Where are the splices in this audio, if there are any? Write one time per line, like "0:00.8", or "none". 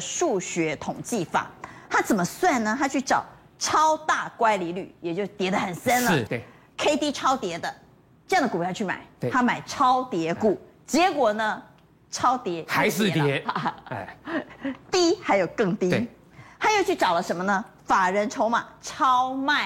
0:06.3